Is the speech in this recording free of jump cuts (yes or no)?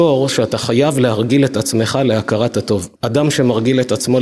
no